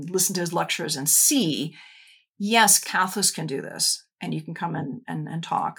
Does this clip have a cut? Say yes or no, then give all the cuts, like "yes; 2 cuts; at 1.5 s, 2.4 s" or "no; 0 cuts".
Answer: no; 0 cuts